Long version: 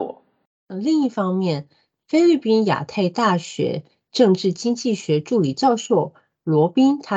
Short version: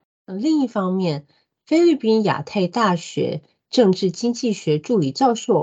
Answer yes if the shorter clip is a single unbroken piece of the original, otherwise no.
yes